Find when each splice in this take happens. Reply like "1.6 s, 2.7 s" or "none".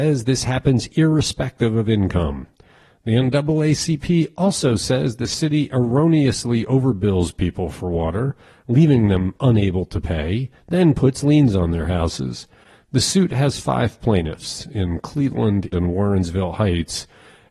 15.7 s